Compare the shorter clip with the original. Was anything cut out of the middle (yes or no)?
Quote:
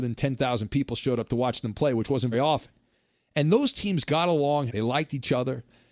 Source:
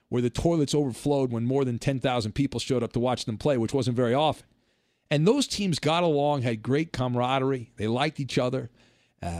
yes